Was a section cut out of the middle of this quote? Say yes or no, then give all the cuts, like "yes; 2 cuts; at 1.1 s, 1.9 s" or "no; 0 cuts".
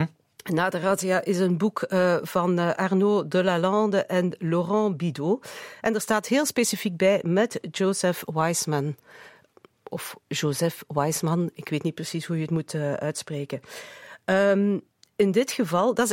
no; 0 cuts